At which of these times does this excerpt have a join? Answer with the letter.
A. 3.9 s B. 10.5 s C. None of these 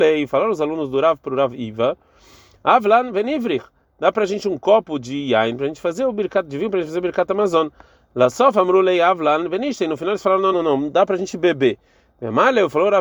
B